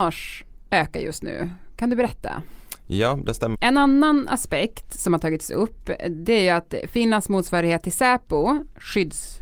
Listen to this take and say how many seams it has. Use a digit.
1